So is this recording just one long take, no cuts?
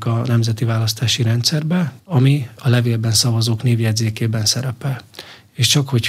no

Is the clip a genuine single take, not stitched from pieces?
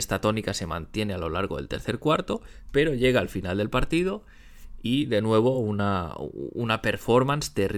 yes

